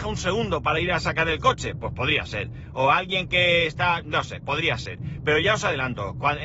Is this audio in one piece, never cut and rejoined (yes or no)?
yes